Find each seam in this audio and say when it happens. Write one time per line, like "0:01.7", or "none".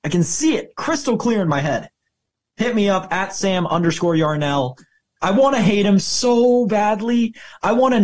0:05.2